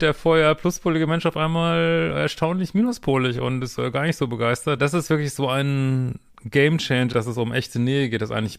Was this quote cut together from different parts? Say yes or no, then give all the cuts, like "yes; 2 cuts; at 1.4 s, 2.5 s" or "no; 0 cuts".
yes; 2 cuts; at 4.8 s, 7.1 s